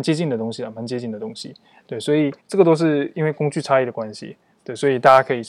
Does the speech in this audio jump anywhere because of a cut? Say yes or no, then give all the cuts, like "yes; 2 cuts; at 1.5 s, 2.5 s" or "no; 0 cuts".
yes; 1 cut; at 2.4 s